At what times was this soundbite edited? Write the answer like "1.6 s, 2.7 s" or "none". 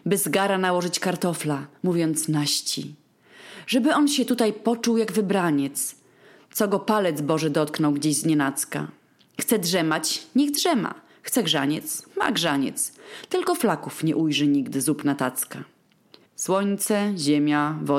16.3 s